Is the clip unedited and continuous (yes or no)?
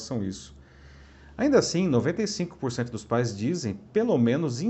yes